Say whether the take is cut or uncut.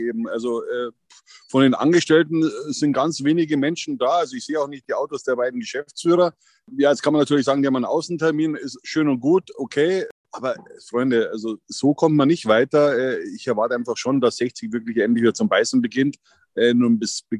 uncut